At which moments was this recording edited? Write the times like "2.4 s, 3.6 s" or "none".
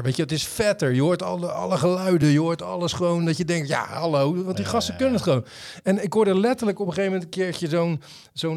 none